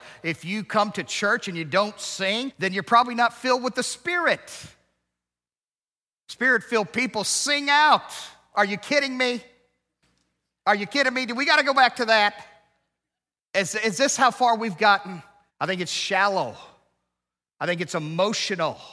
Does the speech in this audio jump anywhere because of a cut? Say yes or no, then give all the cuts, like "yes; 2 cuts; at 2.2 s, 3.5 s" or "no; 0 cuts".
yes; 2 cuts; at 8.5 s, 15.5 s